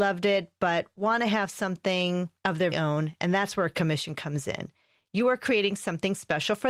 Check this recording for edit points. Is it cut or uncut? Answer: cut